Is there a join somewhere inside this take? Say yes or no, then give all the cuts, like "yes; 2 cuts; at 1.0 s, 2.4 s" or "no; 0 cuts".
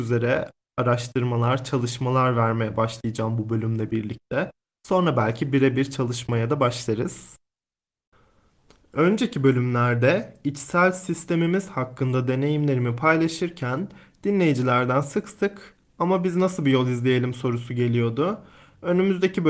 no; 0 cuts